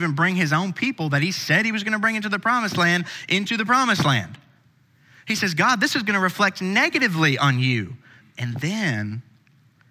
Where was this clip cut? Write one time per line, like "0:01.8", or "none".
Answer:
0:08.2